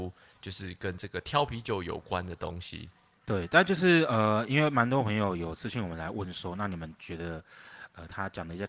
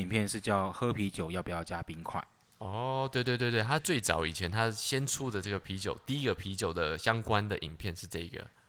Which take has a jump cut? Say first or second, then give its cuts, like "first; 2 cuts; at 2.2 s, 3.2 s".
second; 1 cut; at 3.8 s